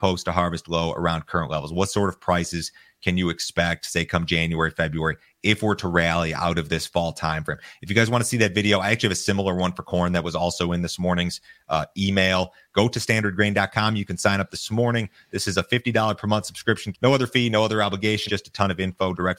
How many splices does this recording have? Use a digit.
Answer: 2